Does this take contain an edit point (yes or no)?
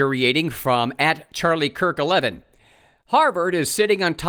no